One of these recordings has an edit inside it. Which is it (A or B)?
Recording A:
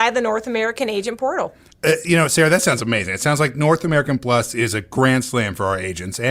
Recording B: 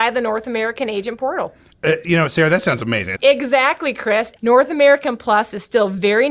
B